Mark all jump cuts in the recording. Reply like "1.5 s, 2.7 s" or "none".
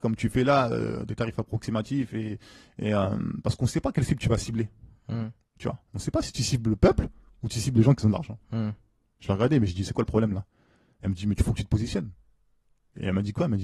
none